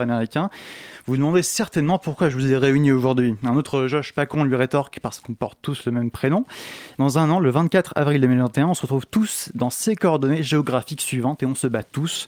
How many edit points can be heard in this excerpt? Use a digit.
1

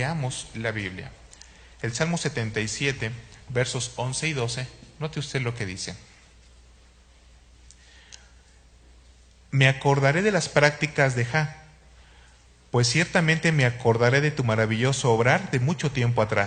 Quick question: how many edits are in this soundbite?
0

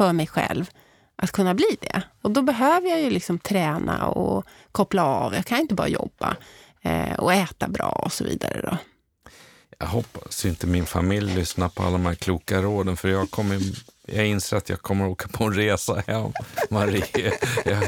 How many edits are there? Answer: 0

